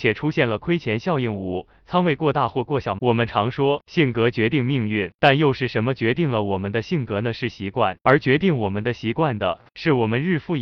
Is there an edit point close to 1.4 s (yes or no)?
no